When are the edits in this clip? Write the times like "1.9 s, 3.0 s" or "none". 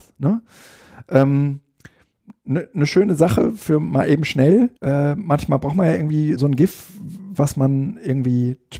4.8 s, 6.4 s